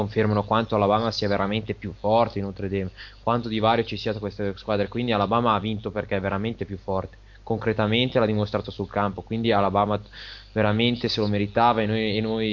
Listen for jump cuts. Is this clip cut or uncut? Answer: uncut